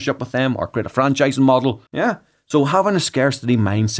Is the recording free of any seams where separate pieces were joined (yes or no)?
no